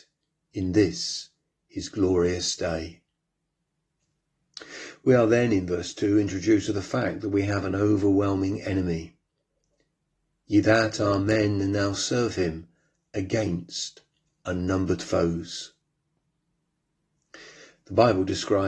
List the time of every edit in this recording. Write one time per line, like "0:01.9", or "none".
none